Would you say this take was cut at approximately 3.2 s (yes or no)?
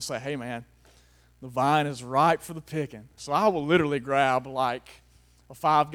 yes